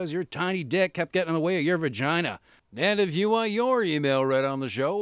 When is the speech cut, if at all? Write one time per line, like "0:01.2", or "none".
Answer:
0:02.6